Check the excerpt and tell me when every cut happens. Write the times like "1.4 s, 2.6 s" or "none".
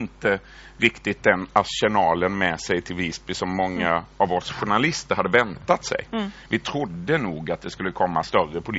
none